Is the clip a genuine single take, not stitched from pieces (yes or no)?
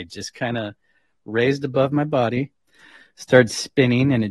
yes